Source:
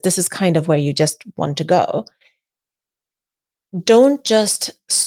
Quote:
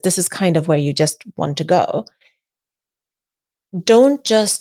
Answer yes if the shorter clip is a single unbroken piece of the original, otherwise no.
yes